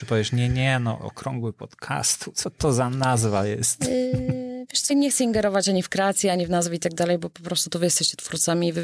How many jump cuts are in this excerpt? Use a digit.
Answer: 1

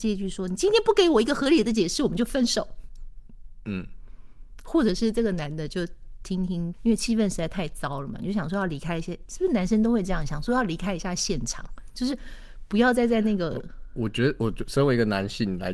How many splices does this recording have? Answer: 1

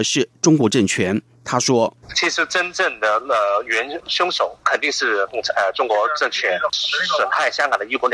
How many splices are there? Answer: 1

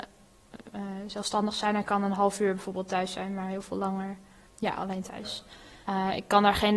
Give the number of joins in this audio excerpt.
1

